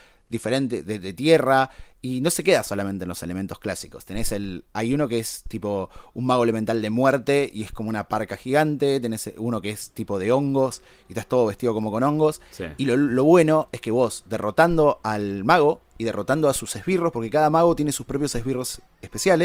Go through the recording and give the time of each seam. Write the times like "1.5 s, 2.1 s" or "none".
none